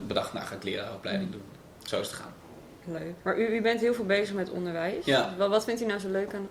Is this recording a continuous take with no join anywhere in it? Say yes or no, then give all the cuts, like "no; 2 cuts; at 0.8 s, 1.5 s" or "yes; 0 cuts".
no; 1 cut; at 3.2 s